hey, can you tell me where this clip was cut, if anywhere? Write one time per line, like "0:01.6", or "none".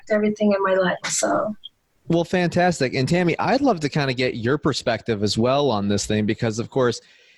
0:01.0